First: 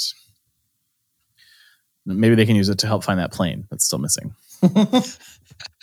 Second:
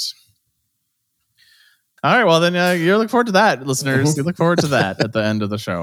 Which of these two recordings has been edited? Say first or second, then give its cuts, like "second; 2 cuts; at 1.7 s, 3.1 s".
second; 1 cut; at 2.0 s